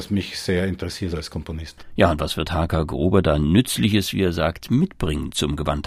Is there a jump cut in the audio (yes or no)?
no